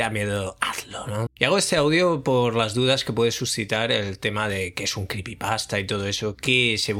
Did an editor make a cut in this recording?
yes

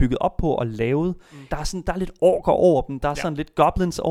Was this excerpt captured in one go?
no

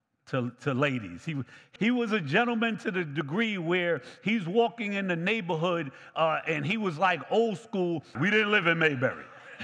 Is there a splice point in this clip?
yes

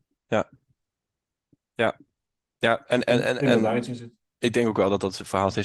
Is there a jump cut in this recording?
no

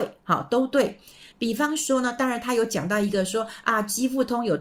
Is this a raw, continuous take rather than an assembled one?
yes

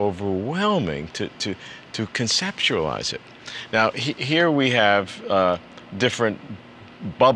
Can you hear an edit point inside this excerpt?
no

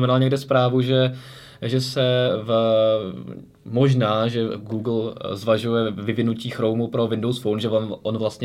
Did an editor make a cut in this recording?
no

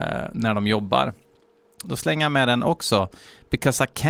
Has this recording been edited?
yes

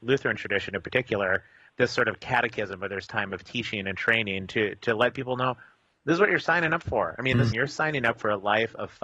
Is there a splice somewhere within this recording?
yes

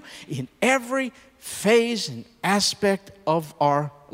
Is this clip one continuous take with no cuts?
yes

